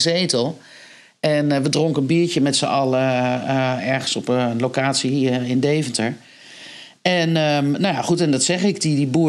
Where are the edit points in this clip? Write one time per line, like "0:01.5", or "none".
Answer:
none